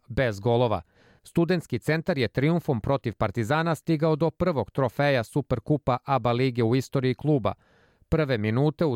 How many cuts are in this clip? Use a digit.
1